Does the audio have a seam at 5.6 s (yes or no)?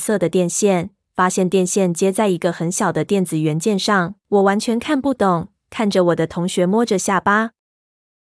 no